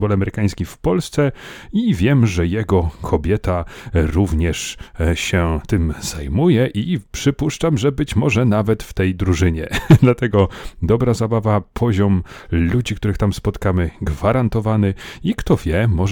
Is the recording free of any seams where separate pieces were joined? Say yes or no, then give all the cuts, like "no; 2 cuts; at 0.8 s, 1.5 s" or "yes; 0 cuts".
yes; 0 cuts